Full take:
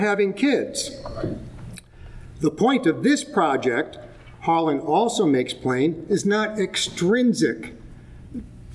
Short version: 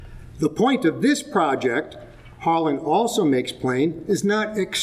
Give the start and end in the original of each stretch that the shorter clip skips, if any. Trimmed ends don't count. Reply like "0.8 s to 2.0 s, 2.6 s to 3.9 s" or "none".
none